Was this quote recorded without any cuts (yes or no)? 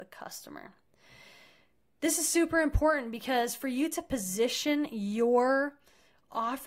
yes